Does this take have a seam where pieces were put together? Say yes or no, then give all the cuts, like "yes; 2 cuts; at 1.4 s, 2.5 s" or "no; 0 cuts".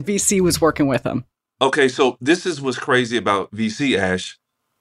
no; 0 cuts